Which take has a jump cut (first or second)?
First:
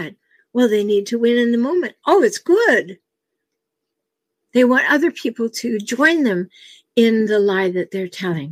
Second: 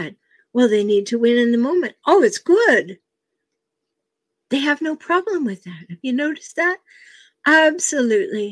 first